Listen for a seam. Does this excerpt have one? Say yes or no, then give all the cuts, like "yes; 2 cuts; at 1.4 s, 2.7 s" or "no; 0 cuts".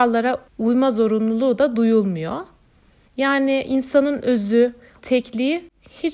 yes; 1 cut; at 5.0 s